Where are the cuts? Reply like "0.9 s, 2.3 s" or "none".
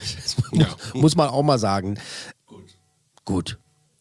2.3 s